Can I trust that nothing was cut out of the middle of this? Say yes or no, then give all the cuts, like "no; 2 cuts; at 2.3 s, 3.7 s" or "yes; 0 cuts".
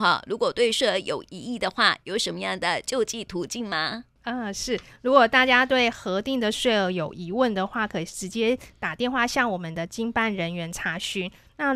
yes; 0 cuts